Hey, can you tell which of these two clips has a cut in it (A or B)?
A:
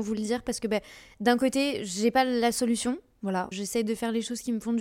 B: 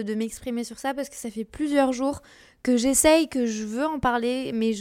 A